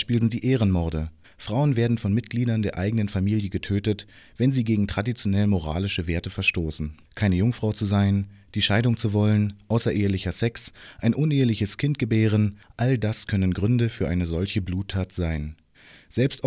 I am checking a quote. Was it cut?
yes; 1 cut; at 7.0 s

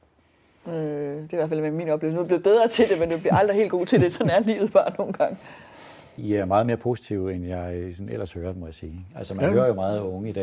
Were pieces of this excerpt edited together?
no; 0 cuts

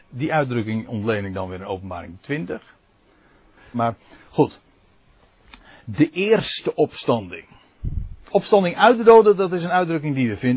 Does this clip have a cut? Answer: yes; 2 cuts; at 3.7 s, 8.3 s

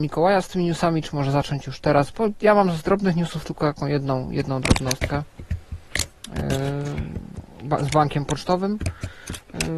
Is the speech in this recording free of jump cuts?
yes; 0 cuts

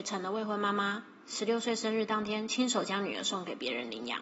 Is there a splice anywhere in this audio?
no; 0 cuts

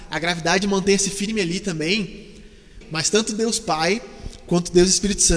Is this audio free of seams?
no; 1 cut; at 2.8 s

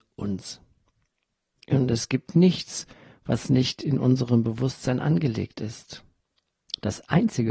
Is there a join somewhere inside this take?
no; 0 cuts

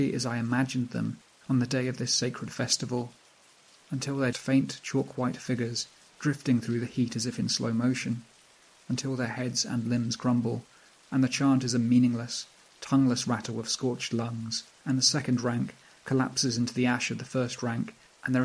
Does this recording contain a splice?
yes; 1 cut; at 4.3 s

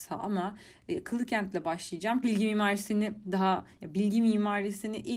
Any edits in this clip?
yes; 1 cut; at 2.2 s

